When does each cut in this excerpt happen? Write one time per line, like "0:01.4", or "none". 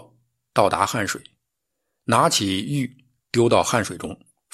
none